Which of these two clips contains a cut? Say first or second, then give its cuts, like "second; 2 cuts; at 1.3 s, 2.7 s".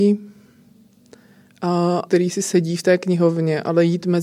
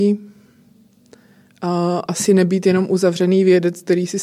first; 1 cut; at 2.1 s